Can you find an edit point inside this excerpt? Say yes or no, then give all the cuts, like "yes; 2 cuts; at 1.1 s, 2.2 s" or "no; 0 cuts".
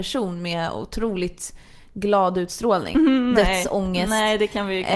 yes; 1 cut; at 2.9 s